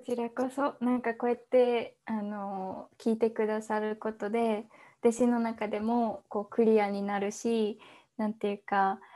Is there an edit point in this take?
no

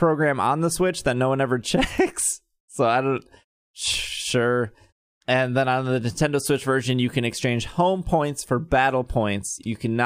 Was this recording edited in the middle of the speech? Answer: no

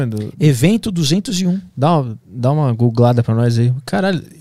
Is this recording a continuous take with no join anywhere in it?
yes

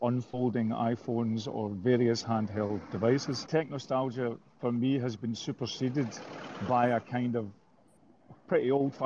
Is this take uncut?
no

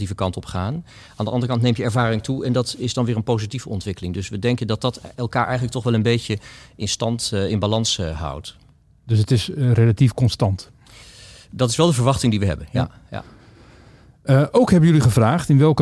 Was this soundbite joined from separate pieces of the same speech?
no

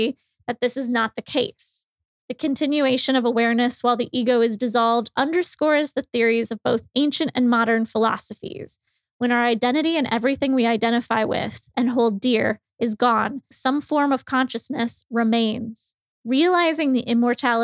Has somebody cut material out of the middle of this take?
yes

